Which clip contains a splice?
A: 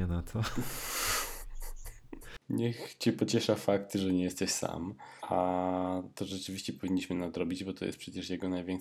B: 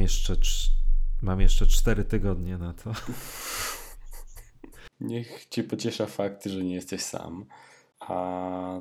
A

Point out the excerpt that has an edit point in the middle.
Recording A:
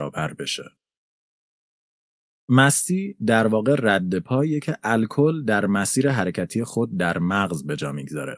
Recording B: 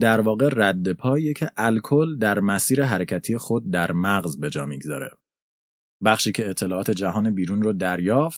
B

